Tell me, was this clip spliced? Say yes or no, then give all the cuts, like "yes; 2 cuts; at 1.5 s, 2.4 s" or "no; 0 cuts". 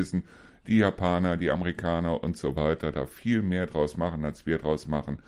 no; 0 cuts